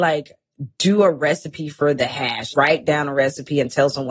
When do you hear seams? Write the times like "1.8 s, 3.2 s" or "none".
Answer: 2.5 s